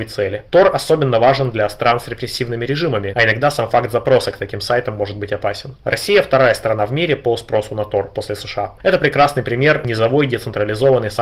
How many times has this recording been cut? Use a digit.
2